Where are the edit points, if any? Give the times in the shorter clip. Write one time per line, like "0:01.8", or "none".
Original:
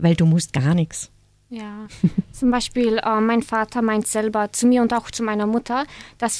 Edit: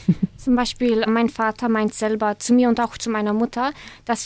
0:01.1